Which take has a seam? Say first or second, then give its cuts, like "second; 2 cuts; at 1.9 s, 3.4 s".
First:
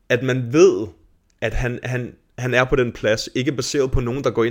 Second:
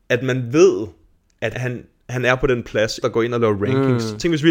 second; 2 cuts; at 1.5 s, 3.0 s